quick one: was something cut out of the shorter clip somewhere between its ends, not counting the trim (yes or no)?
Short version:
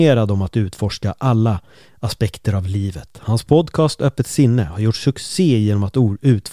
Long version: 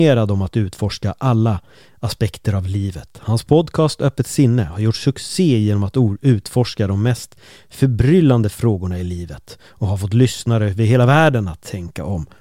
no